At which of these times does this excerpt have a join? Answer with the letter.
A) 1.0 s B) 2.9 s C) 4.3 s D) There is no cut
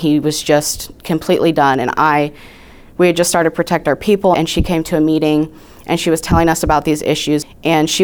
C